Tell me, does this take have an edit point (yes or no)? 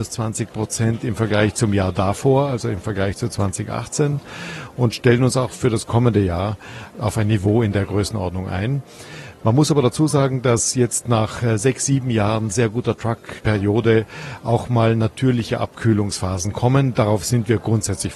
no